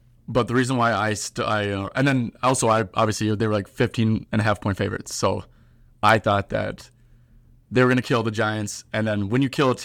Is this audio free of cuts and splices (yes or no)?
yes